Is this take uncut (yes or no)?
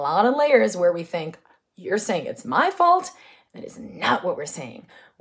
yes